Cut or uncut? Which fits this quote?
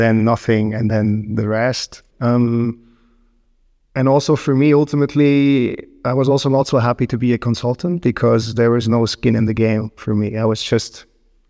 cut